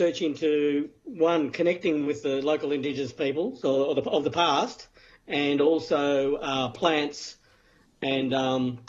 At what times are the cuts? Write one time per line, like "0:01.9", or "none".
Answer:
none